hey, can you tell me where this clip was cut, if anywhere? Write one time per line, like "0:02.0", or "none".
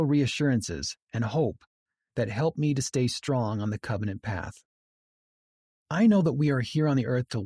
0:05.8